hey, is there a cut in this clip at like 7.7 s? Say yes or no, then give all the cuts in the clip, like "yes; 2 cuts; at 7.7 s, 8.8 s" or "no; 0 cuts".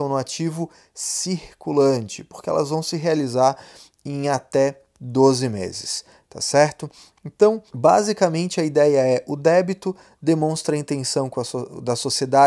yes; 1 cut; at 7.7 s